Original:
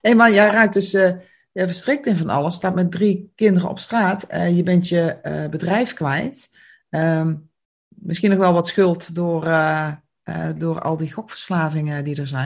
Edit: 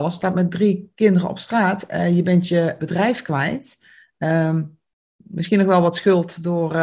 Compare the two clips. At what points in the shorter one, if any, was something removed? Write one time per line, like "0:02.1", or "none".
0:02.8